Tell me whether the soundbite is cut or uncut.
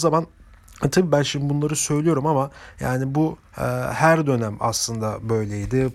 uncut